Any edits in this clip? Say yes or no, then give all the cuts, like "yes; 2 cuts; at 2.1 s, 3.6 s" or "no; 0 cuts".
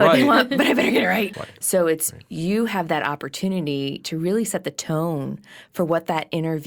yes; 1 cut; at 1.3 s